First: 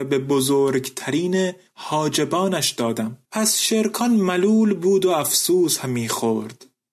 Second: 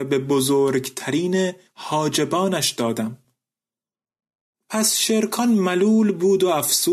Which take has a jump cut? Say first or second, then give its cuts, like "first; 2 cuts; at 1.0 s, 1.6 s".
first; 1 cut; at 3.2 s